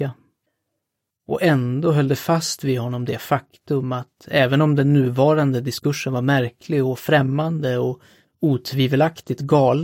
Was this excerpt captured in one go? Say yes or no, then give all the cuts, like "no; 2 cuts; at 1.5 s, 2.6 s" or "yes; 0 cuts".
no; 1 cut; at 1.1 s